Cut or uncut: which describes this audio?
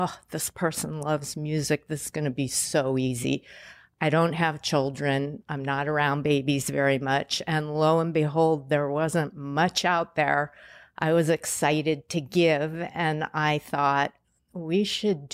uncut